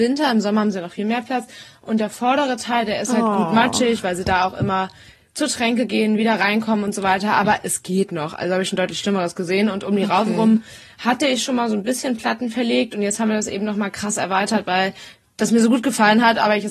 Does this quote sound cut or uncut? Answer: uncut